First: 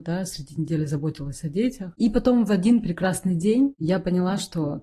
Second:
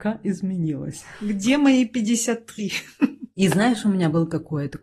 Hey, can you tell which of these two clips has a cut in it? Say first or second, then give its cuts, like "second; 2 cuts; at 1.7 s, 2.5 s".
first; 1 cut; at 2.0 s